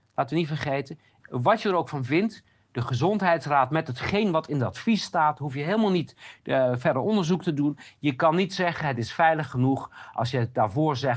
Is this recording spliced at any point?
yes; 1 cut; at 1.2 s

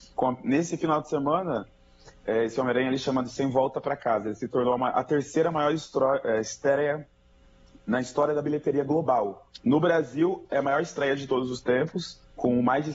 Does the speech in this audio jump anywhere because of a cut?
yes; 1 cut; at 9.6 s

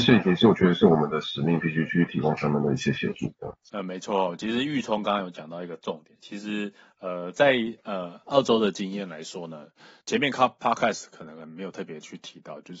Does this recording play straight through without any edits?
yes; 0 cuts

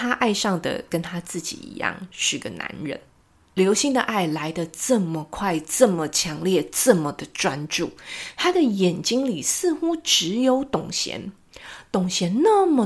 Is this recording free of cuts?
yes; 0 cuts

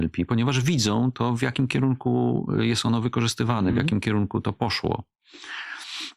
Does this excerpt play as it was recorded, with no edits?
yes; 0 cuts

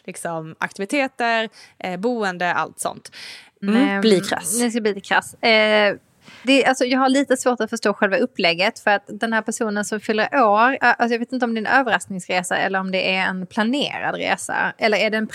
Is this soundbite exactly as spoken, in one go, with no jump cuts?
no; 3 cuts; at 3.6 s, 6.4 s, 10.8 s

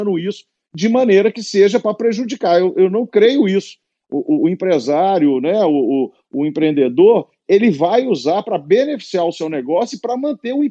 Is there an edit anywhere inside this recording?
no; 0 cuts

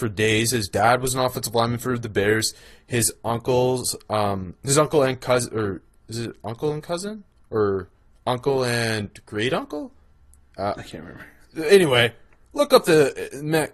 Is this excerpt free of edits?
yes; 0 cuts

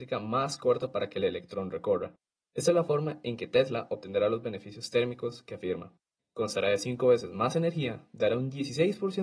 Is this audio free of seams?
no; 1 cut; at 6.2 s

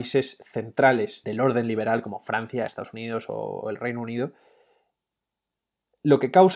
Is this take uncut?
no; 2 cuts; at 1.2 s, 2.7 s

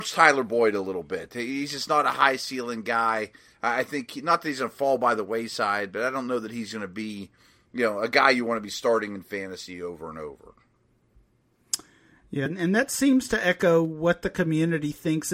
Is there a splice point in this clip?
yes; 1 cut; at 12.5 s

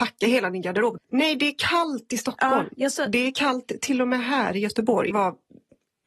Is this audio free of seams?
no; 2 cuts; at 1.0 s, 5.1 s

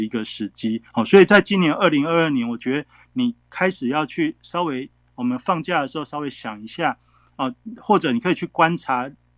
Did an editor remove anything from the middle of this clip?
no; 0 cuts

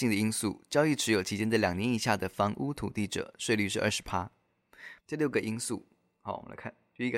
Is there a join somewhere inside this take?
yes; 1 cut; at 5.0 s

